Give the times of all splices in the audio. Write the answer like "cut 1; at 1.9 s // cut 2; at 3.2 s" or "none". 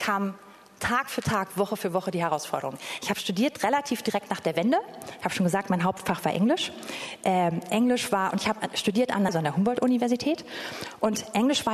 cut 1; at 9.3 s